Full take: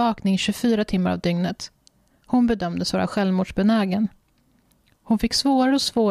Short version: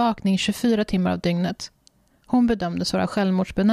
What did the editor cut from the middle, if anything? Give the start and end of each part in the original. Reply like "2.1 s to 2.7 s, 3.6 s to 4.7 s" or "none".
none